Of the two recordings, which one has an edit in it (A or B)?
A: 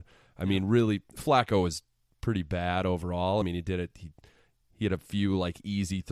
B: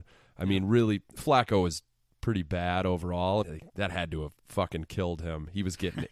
B